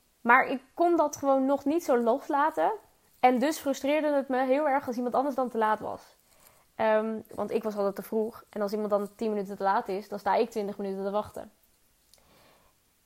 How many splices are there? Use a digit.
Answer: 1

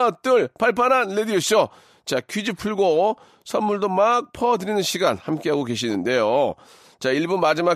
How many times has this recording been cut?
0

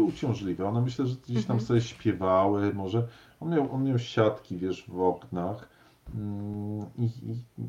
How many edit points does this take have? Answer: 0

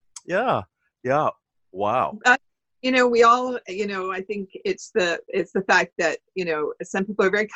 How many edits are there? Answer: 0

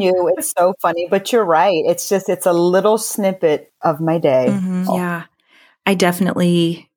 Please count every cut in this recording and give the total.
1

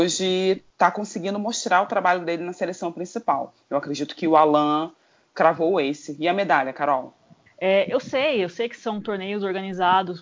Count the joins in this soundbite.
1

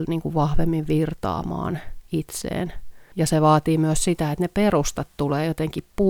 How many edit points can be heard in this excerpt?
1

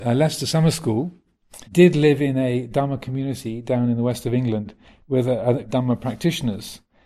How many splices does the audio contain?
2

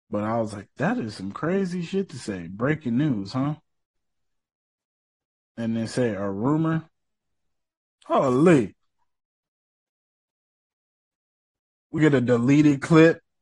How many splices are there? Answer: 1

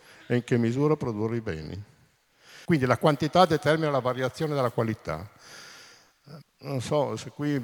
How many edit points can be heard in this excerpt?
2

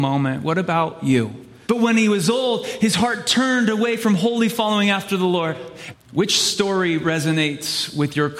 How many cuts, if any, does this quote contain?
2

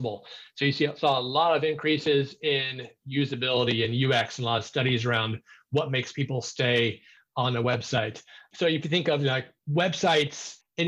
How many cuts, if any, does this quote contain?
0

